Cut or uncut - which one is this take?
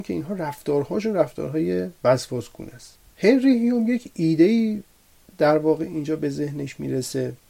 uncut